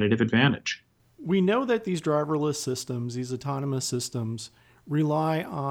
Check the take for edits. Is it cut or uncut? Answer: cut